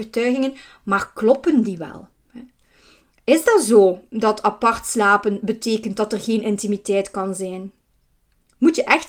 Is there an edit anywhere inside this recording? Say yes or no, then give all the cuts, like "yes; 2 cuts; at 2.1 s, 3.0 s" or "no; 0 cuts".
no; 0 cuts